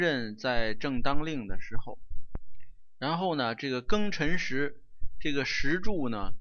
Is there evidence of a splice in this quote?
no; 0 cuts

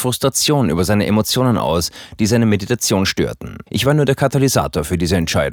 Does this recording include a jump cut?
yes; 1 cut; at 3.7 s

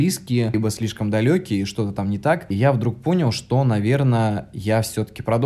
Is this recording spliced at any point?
no; 0 cuts

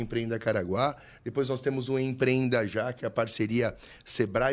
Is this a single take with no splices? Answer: yes; 0 cuts

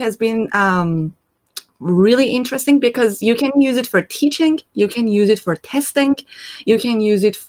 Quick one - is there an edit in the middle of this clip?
no; 0 cuts

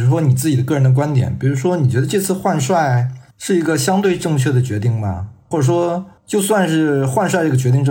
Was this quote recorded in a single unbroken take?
no; 1 cut; at 6.2 s

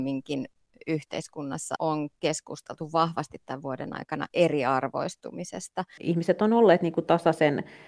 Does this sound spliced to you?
yes; 2 cuts; at 1.8 s, 6.0 s

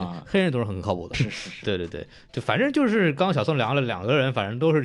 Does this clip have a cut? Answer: yes; 1 cut; at 1.1 s

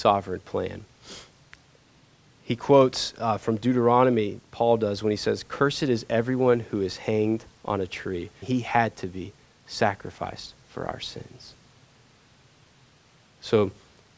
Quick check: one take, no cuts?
no; 1 cut; at 8.4 s

